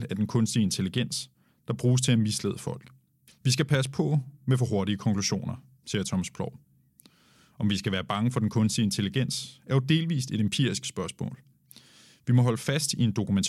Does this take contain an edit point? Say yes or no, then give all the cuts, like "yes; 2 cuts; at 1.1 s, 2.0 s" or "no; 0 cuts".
yes; 1 cut; at 3.3 s